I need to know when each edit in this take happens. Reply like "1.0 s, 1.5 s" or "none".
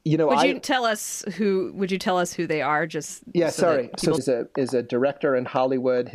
4.2 s